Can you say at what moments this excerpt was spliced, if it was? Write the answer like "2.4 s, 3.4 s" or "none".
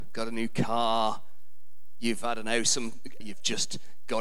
3.2 s